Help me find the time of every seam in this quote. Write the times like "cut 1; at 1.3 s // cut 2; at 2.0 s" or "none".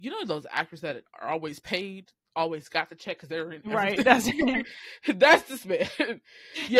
none

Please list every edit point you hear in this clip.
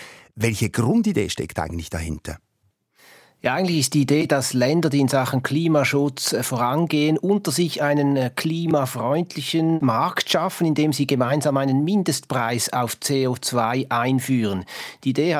none

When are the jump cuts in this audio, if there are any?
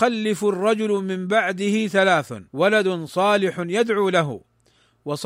cut 1; at 2.5 s

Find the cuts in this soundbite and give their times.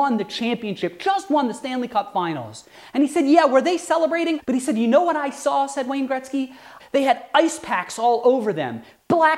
cut 1; at 4.4 s // cut 2; at 6.8 s

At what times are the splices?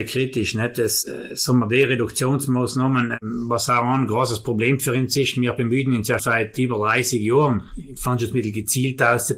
cut 1; at 6.2 s // cut 2; at 8.0 s

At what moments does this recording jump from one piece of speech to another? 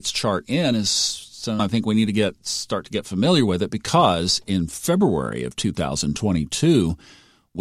cut 1; at 1.6 s

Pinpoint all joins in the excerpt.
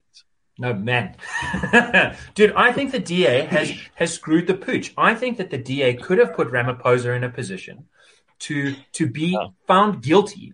none

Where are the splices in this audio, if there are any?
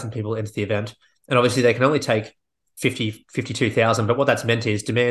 none

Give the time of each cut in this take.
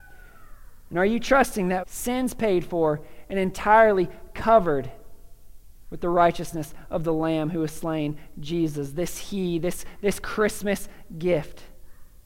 cut 1; at 1.8 s

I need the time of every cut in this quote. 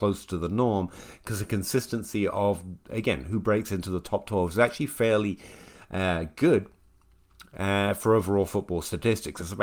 none

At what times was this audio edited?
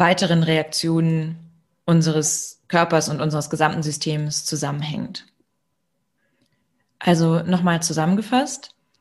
none

